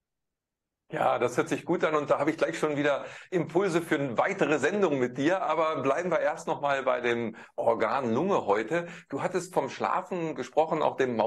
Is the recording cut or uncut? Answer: uncut